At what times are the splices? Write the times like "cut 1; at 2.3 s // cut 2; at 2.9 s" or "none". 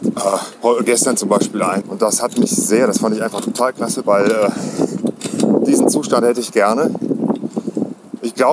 cut 1; at 1.8 s // cut 2; at 4.0 s